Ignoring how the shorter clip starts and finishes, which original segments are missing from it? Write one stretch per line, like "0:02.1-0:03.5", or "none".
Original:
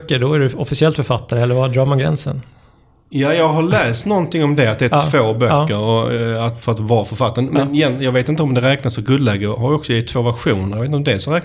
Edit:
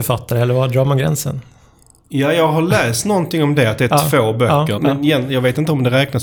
0:05.8-0:07.5